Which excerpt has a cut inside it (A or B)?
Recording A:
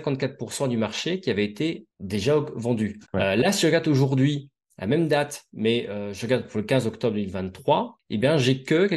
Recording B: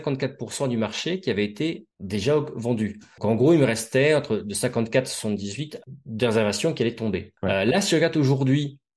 A